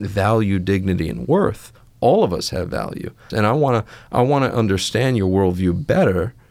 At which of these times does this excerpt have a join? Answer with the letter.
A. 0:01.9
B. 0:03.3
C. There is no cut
B